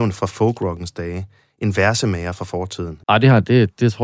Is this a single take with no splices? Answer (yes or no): no